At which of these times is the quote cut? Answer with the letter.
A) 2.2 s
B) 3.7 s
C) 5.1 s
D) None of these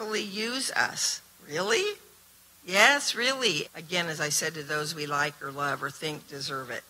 B